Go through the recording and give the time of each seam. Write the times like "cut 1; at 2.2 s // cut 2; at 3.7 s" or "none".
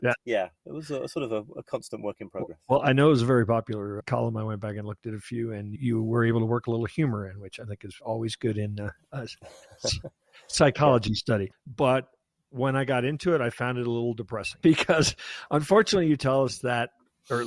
cut 1; at 8.0 s // cut 2; at 11.5 s